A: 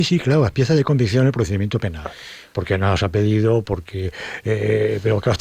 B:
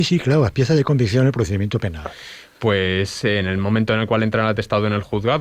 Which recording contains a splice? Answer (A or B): A